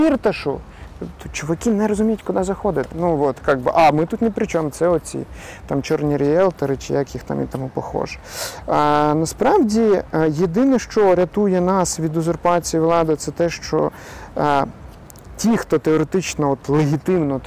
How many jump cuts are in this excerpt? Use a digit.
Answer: 1